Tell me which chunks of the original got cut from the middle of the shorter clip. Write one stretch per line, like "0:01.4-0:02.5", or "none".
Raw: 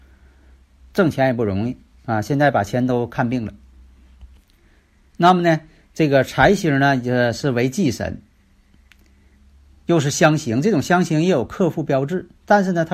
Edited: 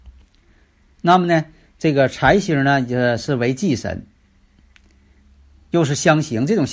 none